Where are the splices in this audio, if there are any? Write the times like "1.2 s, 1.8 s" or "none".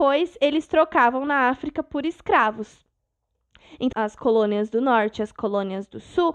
3.9 s